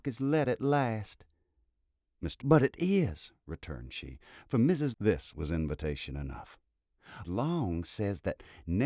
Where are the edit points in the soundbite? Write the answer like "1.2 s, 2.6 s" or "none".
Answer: 2.4 s, 4.9 s, 7.2 s